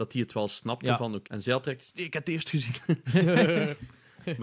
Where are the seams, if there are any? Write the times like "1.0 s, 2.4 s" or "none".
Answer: 1.3 s